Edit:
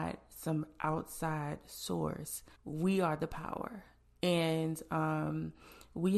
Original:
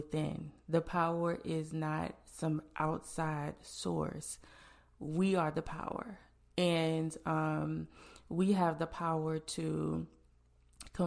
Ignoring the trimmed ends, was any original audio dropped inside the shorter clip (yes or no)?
yes